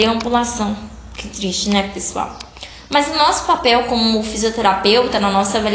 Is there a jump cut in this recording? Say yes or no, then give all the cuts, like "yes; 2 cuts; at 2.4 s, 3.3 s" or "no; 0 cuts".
no; 0 cuts